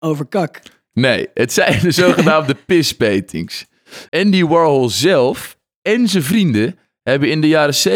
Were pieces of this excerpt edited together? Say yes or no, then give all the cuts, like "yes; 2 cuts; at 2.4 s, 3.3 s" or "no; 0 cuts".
yes; 1 cut; at 4.1 s